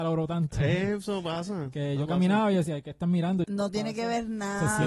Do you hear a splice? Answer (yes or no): yes